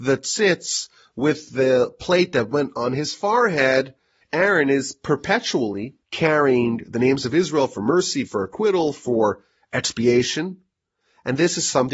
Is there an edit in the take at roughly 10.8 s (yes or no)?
no